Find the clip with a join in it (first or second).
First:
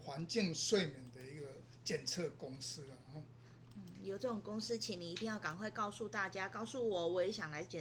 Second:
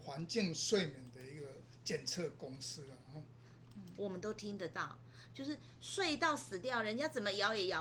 second